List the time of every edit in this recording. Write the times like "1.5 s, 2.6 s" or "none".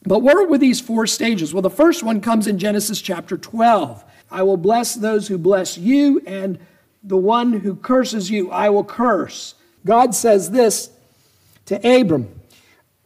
4.2 s, 9.8 s